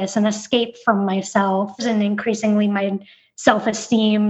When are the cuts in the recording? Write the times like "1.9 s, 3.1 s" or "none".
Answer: 1.8 s

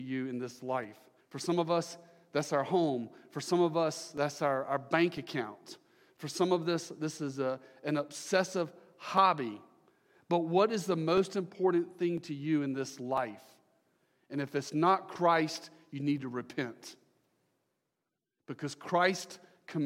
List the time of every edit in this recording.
1.2 s

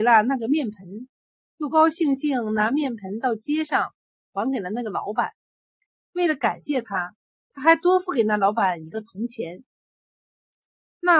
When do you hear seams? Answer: 1.7 s

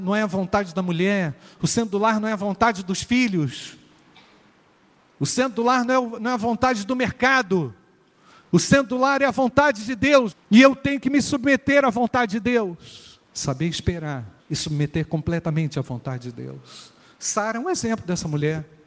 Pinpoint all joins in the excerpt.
10.3 s, 13.3 s, 14.4 s

